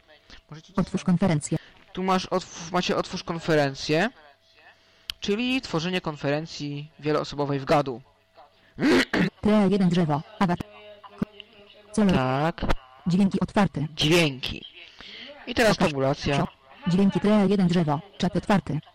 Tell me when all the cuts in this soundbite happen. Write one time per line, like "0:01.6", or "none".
0:09.2